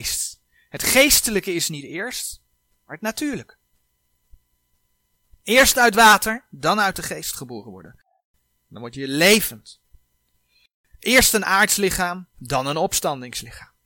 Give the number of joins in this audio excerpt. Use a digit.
0